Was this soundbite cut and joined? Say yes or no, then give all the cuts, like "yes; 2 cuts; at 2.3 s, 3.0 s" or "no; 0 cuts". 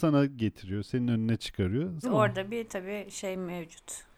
yes; 1 cut; at 2.0 s